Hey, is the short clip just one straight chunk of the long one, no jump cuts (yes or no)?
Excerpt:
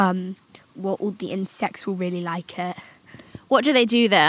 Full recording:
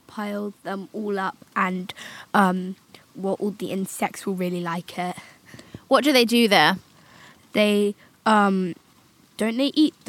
yes